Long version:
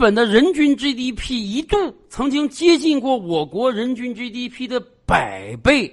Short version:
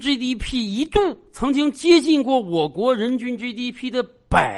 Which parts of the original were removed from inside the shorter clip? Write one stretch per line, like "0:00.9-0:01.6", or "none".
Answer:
none